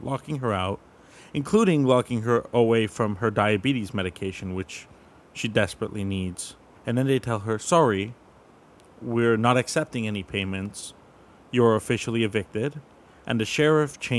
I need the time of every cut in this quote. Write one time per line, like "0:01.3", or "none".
0:06.7